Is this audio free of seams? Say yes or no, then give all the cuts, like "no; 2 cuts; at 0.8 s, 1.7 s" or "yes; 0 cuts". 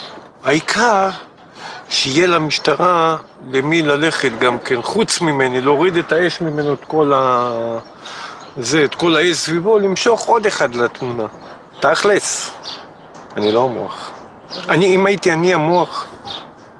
yes; 0 cuts